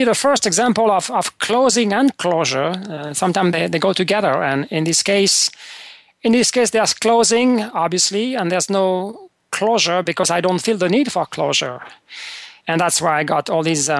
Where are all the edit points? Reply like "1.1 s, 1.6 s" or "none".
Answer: 12.6 s